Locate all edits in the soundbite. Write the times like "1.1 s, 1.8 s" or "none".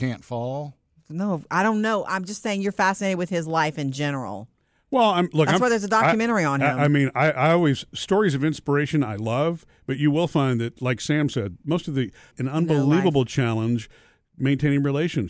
12.3 s